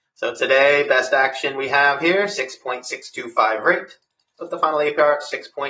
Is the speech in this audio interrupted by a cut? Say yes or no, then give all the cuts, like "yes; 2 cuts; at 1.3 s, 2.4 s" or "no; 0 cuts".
yes; 1 cut; at 4.3 s